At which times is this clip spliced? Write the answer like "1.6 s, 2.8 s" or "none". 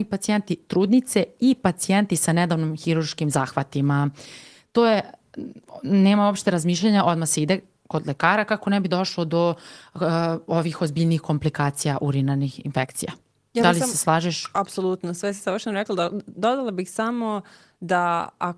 none